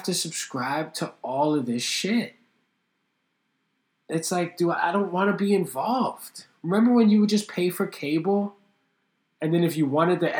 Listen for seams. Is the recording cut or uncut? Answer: uncut